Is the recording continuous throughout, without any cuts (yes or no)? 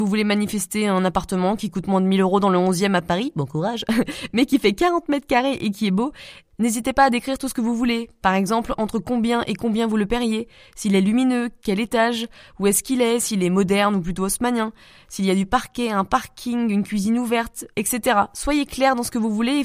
yes